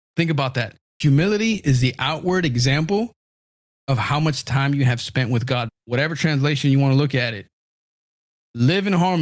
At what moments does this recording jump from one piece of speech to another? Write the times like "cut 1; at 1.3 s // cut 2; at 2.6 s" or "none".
cut 1; at 5.7 s